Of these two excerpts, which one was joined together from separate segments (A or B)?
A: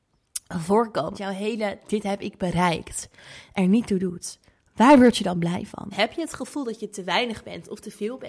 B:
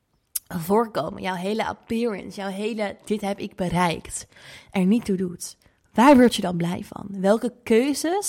A